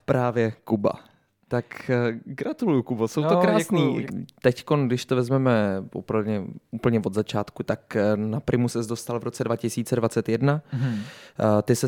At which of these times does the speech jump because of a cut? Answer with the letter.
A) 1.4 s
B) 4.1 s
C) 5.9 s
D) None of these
B